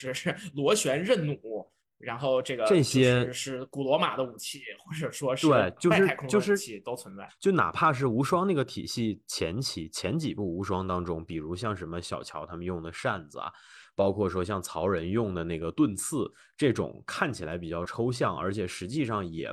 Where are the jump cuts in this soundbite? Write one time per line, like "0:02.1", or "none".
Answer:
0:07.3